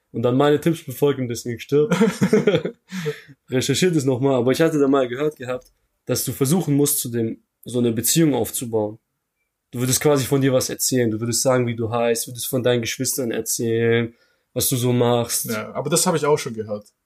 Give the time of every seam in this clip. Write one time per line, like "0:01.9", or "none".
none

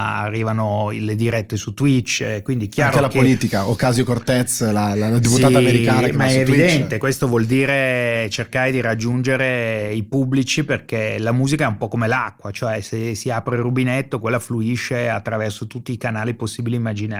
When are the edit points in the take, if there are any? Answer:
none

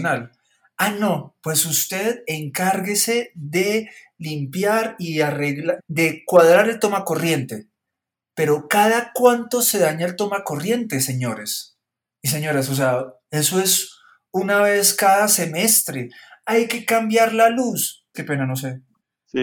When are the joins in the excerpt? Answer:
0:05.8
0:18.1

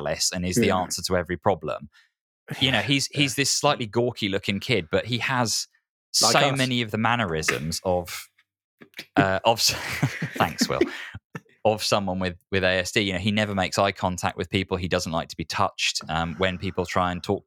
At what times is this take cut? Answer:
0:02.5

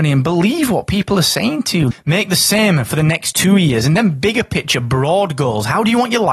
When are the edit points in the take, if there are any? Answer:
0:01.9

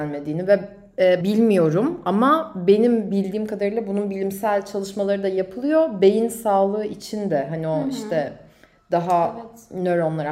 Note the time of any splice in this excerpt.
0:01.2

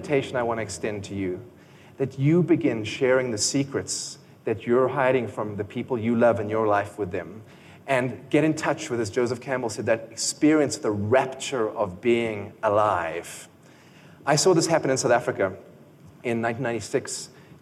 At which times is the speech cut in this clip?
none

